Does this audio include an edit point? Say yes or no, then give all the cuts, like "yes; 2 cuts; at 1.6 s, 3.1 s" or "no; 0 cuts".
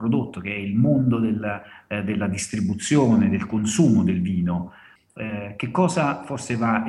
yes; 1 cut; at 5.0 s